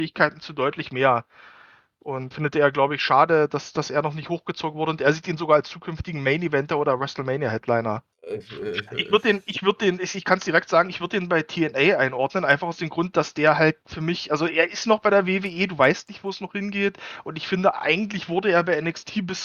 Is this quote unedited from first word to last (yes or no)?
no